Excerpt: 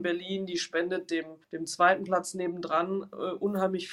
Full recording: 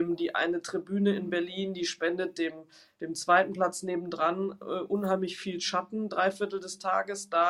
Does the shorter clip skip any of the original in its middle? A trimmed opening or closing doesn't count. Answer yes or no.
yes